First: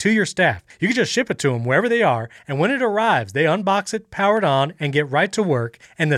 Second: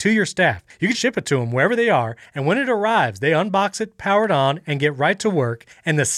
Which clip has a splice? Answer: second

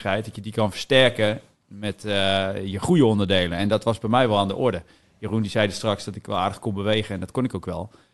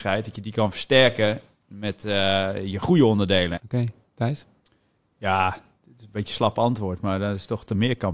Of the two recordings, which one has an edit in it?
second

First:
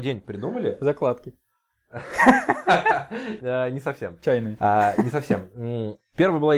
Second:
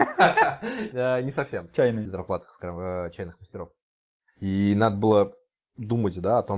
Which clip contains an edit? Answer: second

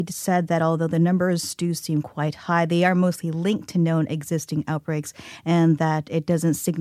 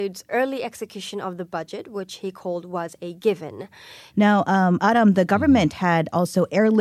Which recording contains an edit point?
second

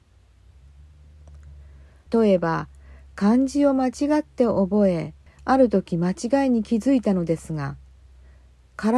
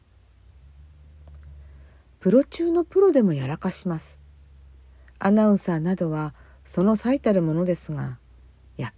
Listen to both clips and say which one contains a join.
first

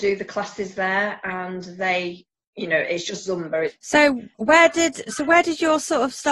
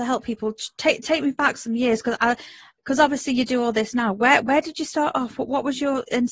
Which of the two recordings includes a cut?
first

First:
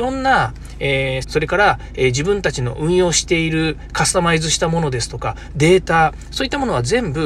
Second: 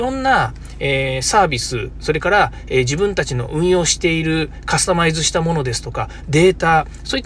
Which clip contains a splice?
first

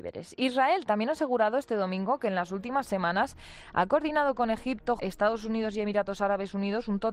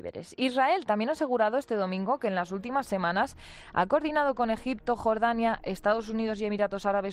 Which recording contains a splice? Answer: first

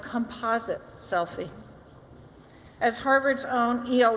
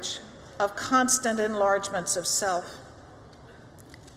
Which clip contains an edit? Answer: first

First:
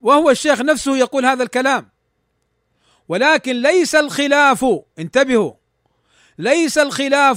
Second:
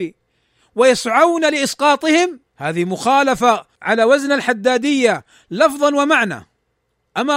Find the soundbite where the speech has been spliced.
second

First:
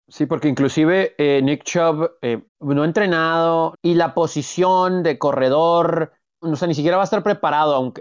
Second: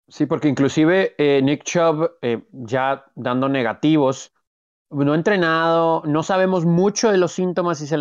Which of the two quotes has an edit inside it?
first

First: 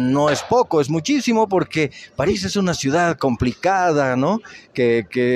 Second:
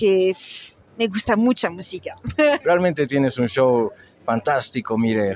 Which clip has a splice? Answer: second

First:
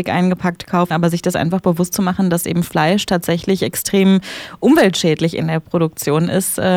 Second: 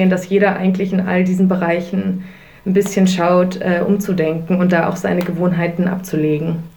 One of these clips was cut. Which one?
first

